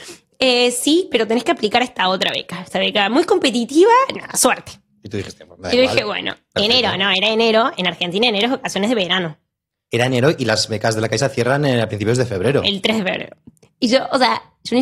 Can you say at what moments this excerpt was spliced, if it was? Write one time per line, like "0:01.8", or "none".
none